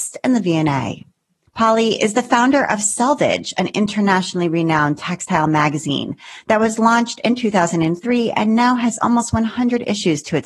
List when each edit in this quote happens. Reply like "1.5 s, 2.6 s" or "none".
1.5 s